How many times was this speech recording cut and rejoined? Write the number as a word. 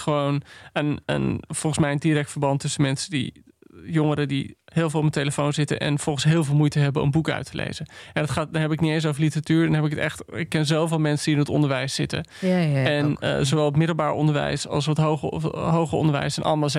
zero